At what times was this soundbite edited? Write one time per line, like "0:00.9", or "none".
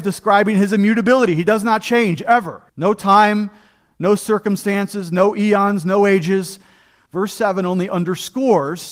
0:02.7
0:07.1